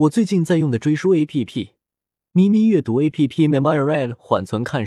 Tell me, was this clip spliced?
no; 0 cuts

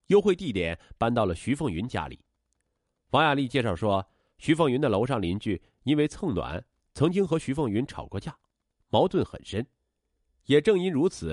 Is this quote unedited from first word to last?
yes; 0 cuts

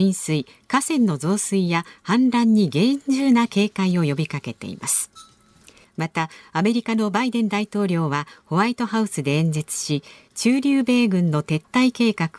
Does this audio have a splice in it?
yes; 1 cut; at 5.8 s

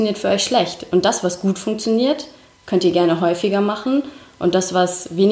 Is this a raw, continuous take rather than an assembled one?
yes; 0 cuts

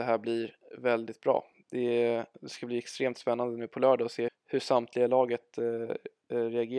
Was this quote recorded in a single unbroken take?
no; 1 cut; at 4.3 s

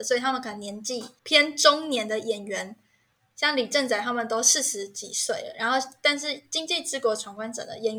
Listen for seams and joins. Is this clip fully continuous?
yes; 0 cuts

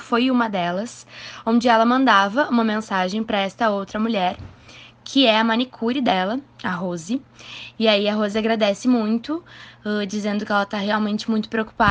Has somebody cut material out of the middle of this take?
yes; 1 cut; at 7.8 s

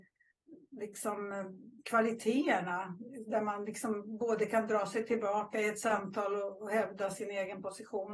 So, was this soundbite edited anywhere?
no; 0 cuts

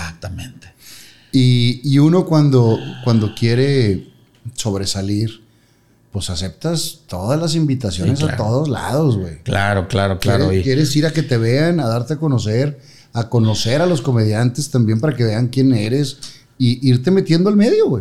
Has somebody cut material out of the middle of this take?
no; 0 cuts

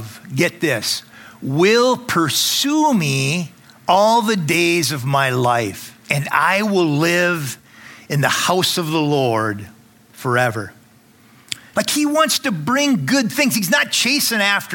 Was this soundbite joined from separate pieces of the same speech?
yes; 2 cuts; at 6.0 s, 11.7 s

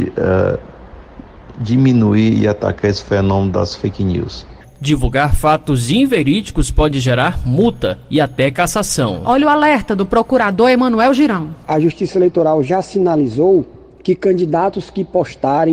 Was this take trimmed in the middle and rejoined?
yes; 1 cut; at 4.6 s

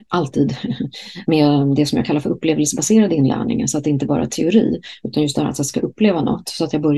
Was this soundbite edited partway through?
no; 0 cuts

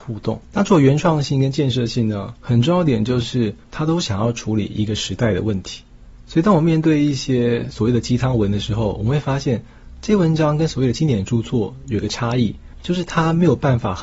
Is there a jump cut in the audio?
yes; 1 cut; at 3.6 s

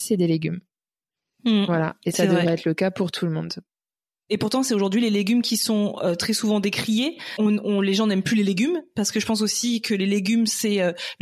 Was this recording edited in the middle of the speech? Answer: no; 0 cuts

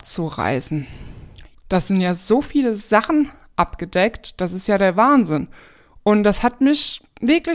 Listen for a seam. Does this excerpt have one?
yes; 1 cut; at 1.5 s

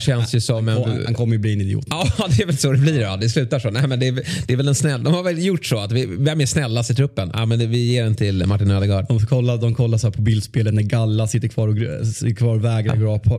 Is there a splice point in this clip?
no; 0 cuts

